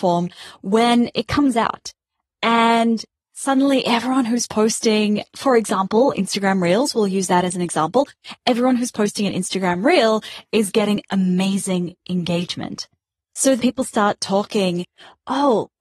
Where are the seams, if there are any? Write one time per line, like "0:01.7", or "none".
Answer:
0:13.6